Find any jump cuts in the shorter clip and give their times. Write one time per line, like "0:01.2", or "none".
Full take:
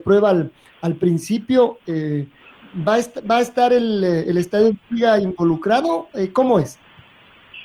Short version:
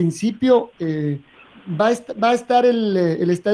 none

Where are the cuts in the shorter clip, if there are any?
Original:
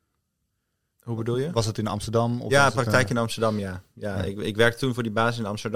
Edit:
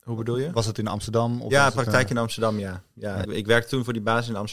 0:03.2

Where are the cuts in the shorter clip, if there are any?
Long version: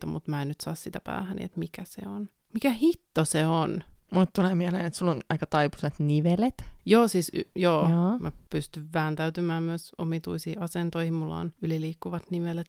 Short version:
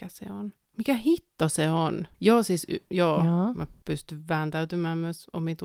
0:02.1

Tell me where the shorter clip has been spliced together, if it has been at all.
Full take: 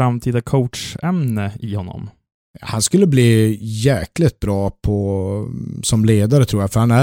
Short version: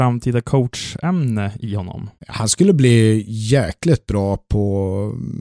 0:02.2

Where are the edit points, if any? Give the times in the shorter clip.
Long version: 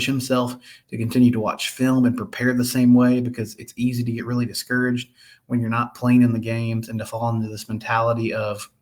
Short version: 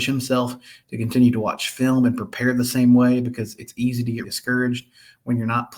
0:04.2

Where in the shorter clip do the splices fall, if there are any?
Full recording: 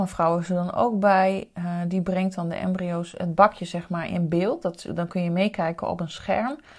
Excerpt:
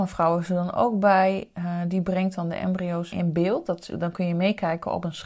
0:03.1

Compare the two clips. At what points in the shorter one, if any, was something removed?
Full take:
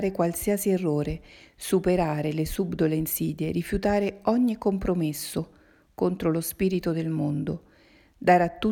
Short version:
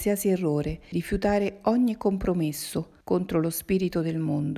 0:00.9
0:03.0

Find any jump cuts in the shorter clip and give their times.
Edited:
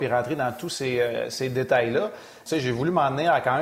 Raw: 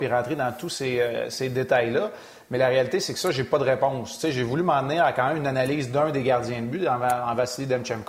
0:02.5

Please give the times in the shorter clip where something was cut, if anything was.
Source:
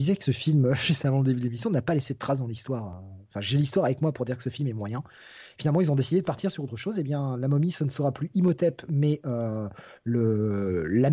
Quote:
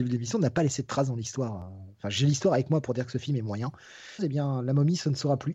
0:04.2

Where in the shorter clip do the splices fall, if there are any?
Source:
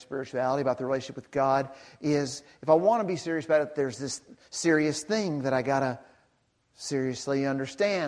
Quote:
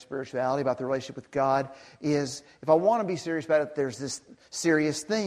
none

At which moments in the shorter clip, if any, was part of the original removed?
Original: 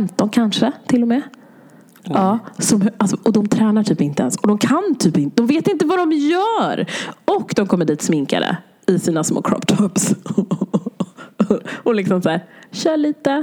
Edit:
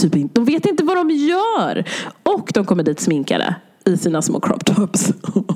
none

